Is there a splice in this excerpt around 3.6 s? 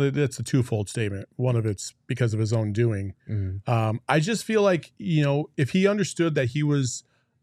no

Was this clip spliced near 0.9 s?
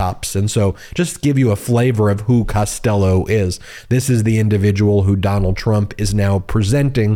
no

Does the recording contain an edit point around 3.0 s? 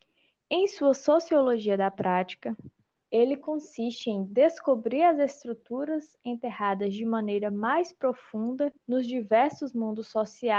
yes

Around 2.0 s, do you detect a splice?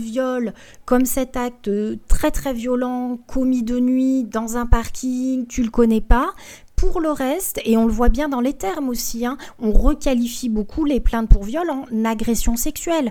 no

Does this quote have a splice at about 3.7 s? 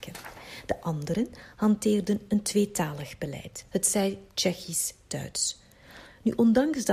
yes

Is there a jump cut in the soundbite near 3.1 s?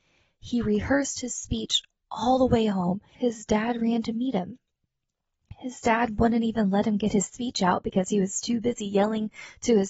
yes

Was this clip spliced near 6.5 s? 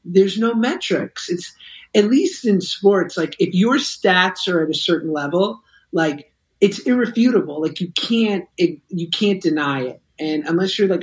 no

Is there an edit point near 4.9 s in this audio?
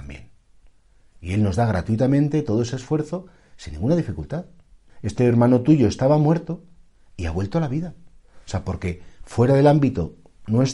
yes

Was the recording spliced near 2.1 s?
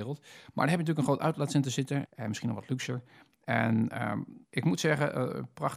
yes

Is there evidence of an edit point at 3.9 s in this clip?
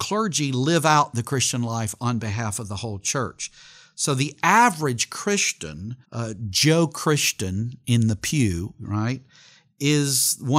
no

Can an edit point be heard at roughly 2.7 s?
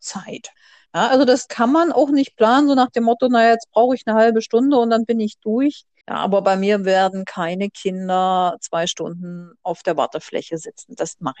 no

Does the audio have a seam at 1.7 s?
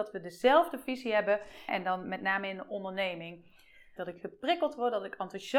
yes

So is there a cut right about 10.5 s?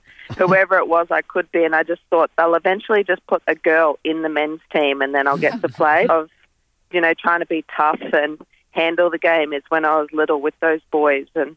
no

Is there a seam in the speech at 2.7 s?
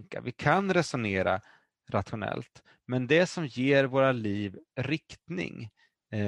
no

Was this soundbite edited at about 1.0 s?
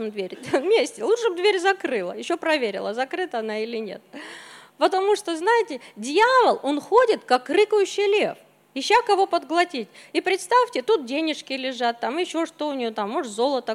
no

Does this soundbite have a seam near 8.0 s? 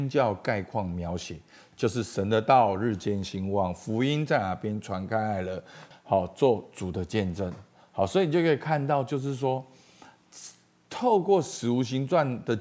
no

